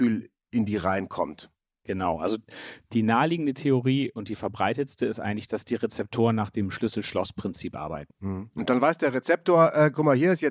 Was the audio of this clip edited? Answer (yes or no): yes